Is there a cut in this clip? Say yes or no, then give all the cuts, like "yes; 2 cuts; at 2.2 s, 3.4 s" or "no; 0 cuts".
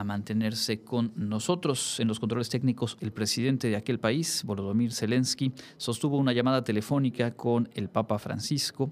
yes; 1 cut; at 3.0 s